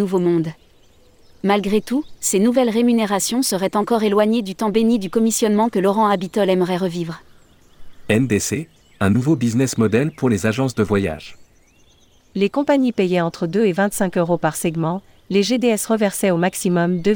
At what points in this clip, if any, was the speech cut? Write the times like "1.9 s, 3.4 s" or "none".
none